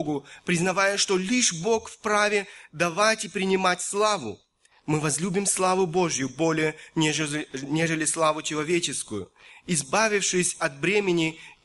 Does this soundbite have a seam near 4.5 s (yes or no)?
no